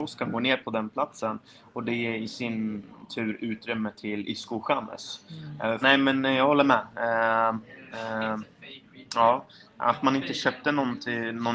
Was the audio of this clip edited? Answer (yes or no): yes